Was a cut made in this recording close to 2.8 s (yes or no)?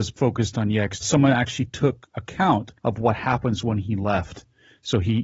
yes